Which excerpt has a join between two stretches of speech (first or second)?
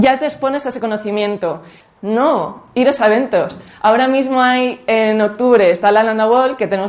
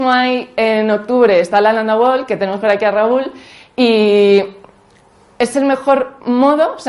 first